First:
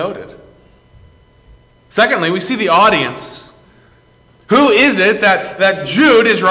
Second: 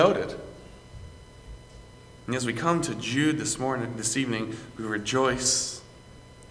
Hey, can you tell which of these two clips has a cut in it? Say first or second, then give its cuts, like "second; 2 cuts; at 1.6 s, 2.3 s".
first; 1 cut; at 1.7 s